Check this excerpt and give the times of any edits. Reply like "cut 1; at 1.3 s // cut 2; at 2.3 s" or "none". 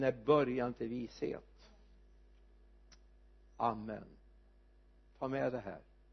none